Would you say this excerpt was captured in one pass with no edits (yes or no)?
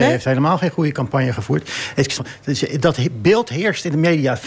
no